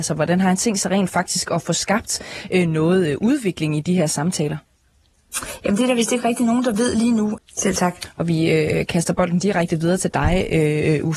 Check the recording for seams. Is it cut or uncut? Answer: cut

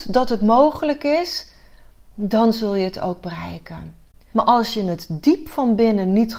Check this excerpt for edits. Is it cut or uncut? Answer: cut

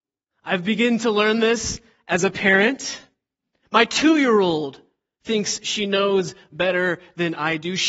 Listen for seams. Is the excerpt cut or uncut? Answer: uncut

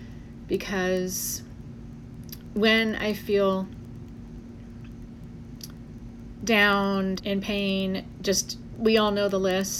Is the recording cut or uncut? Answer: cut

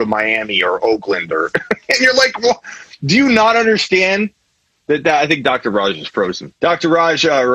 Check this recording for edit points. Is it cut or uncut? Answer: cut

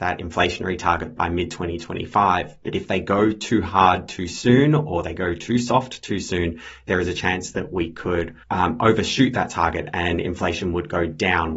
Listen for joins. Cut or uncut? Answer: cut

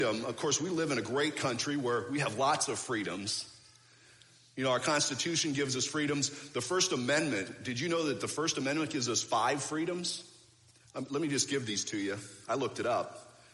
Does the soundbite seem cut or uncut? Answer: uncut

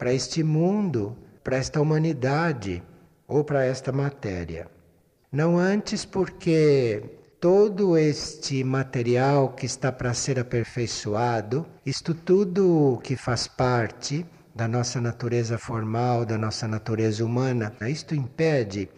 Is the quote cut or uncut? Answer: cut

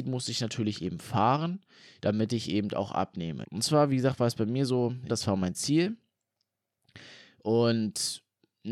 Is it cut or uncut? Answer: cut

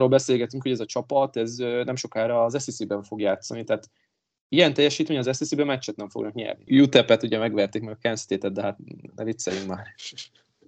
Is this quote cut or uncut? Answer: cut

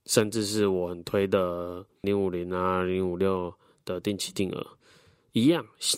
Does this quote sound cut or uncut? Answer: cut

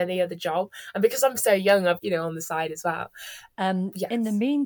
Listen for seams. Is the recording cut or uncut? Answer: cut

